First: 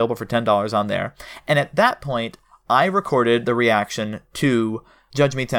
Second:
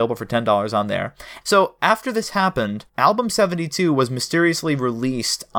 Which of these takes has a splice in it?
second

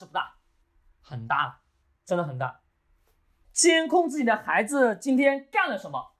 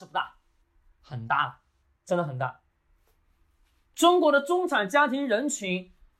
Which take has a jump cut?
first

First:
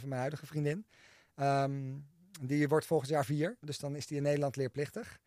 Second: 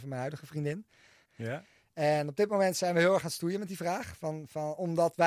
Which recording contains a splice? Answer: second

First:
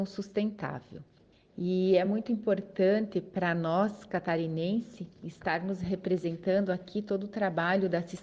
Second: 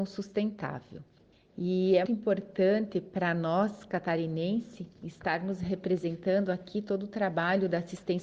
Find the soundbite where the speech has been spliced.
second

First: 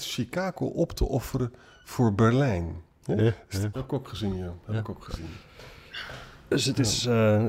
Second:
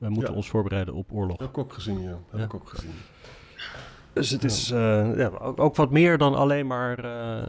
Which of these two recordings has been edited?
first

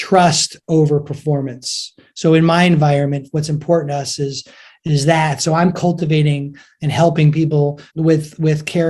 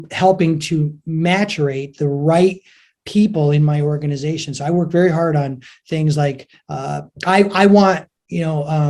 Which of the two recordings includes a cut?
first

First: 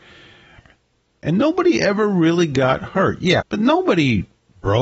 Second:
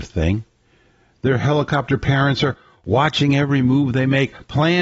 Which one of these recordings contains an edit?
first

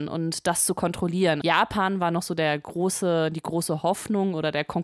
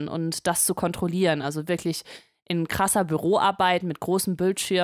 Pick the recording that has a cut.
first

